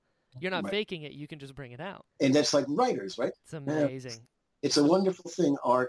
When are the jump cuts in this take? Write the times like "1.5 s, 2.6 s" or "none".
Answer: 2.1 s, 3.3 s